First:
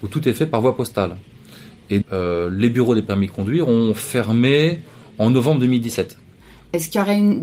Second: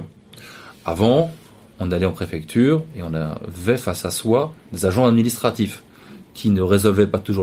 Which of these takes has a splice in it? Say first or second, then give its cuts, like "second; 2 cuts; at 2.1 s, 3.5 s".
first; 1 cut; at 2.0 s